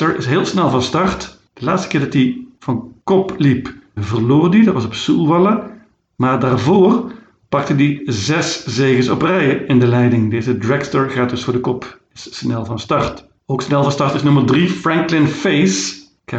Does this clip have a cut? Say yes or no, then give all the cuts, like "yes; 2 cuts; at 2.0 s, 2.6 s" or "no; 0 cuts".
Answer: yes; 1 cut; at 4.0 s